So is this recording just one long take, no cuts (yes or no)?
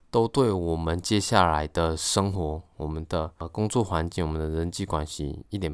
yes